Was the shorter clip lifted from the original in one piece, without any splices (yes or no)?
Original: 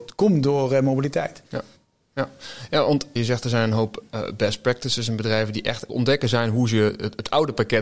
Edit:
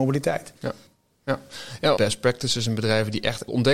no